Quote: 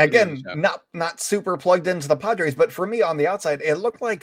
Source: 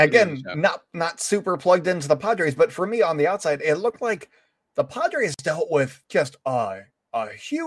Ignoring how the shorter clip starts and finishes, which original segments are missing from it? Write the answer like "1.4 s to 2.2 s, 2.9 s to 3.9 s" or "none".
none

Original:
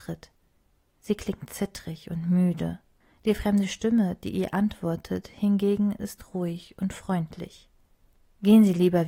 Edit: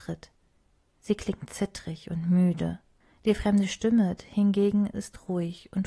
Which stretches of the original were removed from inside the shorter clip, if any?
4.2 s to 5.2 s

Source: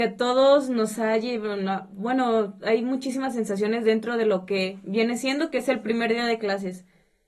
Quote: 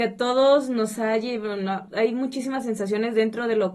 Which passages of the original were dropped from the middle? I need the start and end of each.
1.9 s to 2.6 s

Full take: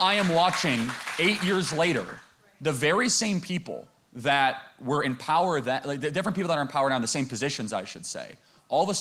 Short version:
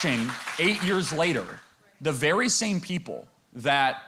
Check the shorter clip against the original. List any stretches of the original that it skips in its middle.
none

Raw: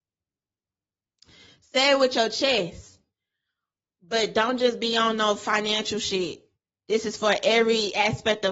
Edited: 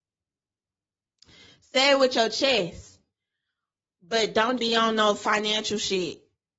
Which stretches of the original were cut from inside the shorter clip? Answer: 4.6 s to 4.8 s

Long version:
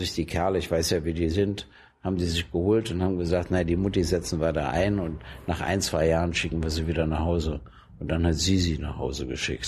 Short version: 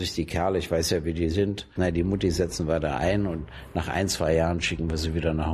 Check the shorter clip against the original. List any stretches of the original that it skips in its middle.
1.8 s to 3.5 s

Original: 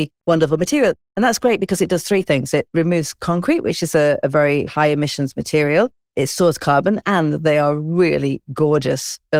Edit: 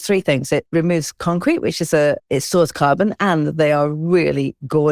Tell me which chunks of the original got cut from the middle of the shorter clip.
4.2 s to 6.1 s

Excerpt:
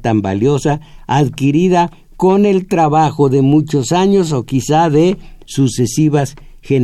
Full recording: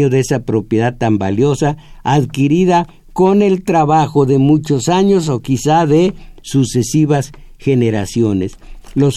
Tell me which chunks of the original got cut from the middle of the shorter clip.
none

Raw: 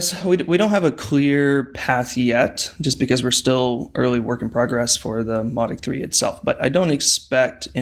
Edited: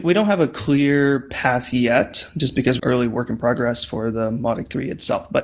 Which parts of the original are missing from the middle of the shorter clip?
3.2 s to 3.9 s

